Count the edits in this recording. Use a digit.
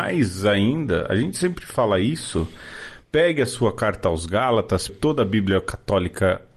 1